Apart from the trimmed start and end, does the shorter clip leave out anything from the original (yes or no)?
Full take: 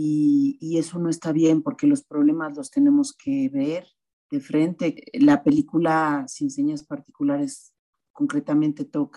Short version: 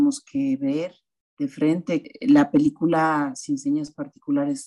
no